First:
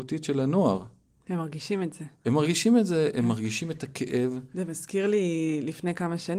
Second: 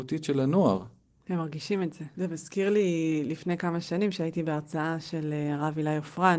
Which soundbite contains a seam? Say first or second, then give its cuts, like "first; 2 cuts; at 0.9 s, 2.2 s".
second; 1 cut; at 2.1 s